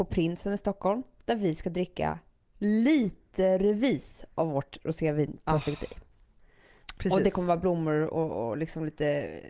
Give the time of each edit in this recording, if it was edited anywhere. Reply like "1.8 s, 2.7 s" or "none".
none